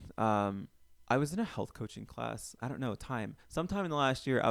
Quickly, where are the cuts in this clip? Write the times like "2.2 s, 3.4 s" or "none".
2.6 s

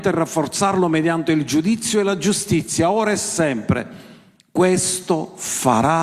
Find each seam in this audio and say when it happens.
none

